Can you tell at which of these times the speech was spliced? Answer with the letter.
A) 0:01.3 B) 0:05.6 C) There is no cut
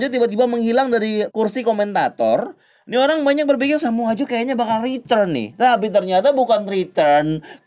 A